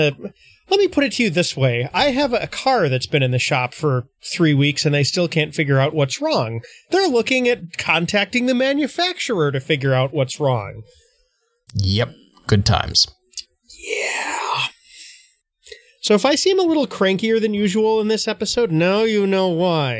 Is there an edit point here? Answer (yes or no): no